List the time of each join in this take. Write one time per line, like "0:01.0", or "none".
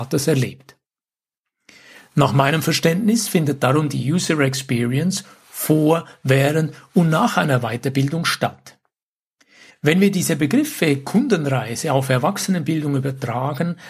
0:09.7

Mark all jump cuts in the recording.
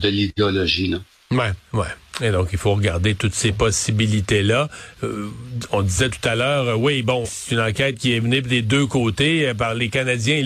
0:01.6
0:07.2

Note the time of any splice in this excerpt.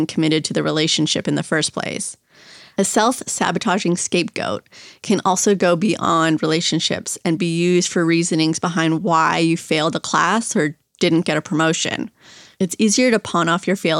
none

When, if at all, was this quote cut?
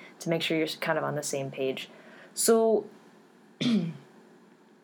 none

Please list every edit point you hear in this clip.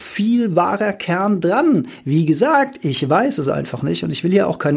none

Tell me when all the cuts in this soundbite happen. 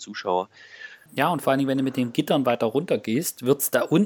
0:01.1

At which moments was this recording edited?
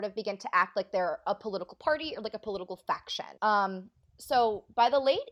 0:03.4

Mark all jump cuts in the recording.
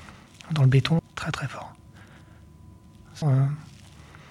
0:01.0
0:03.2

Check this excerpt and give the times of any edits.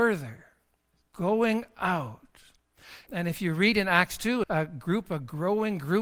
0:03.1
0:04.4

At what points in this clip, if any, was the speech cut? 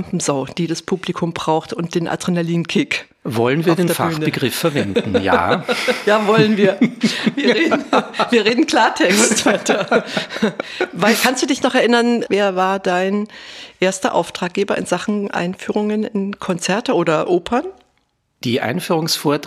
none

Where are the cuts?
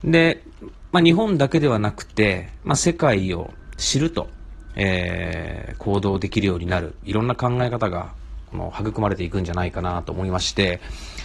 none

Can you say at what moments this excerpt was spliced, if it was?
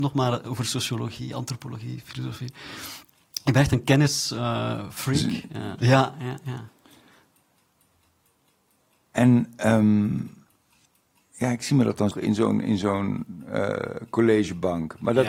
0:05.8
0:12.1

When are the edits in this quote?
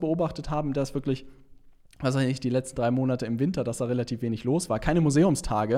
none

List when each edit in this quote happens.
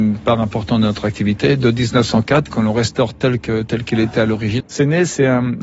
0:02.5
0:04.6

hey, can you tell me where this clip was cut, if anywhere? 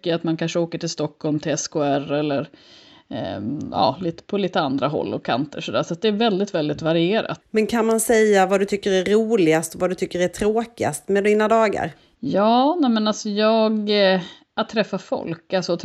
0:07.4

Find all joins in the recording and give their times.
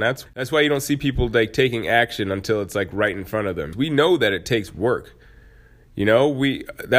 0:03.7

